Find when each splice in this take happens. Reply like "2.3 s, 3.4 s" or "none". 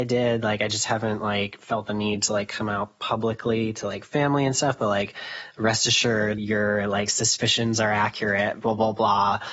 6.4 s